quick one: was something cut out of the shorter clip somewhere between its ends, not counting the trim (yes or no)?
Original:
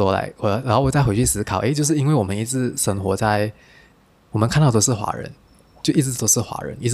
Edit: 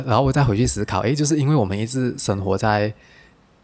no